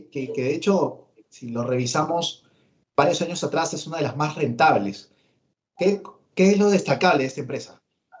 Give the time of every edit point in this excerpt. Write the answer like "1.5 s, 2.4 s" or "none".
none